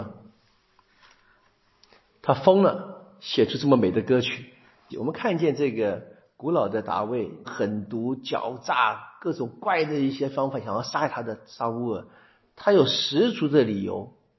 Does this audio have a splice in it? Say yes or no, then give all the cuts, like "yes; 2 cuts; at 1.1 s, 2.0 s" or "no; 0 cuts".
yes; 2 cuts; at 4.9 s, 7.4 s